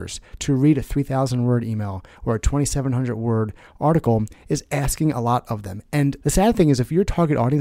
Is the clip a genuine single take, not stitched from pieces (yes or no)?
yes